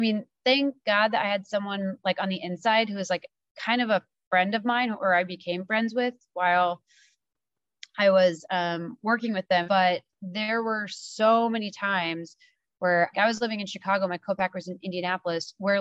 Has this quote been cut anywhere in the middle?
yes; 2 cuts; at 9.6 s, 13.1 s

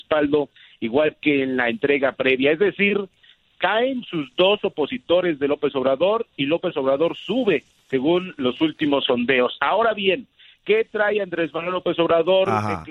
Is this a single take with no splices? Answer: yes; 0 cuts

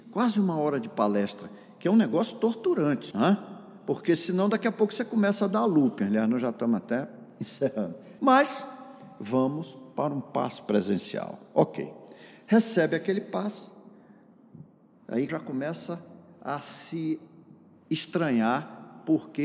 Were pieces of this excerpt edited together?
yes; 3 cuts; at 3.1 s, 8.2 s, 15.3 s

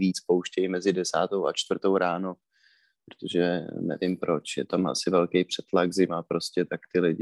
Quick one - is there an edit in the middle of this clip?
no; 0 cuts

